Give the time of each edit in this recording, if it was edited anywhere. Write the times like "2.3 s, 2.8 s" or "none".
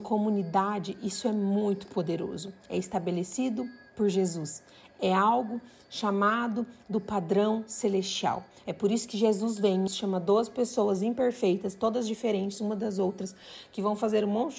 9.9 s

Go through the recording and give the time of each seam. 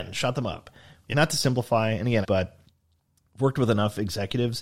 1.1 s, 2.2 s

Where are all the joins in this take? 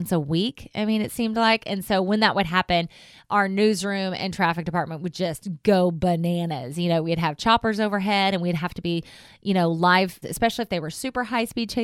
10.2 s

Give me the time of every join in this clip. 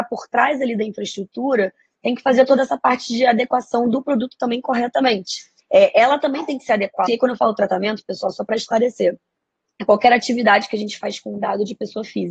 5.6 s, 7.1 s

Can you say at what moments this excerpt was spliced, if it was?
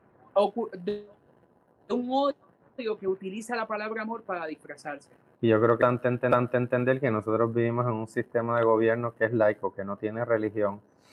5.4 s

